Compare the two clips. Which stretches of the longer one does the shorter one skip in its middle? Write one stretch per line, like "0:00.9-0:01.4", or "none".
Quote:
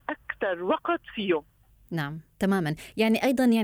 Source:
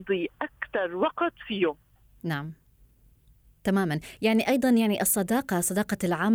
0:02.6-0:03.6